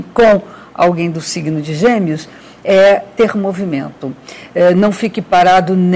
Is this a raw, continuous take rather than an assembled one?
yes; 0 cuts

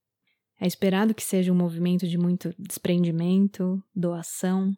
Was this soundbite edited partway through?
no; 0 cuts

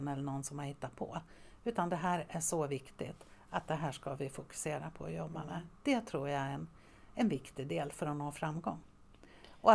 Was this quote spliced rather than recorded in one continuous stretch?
no; 0 cuts

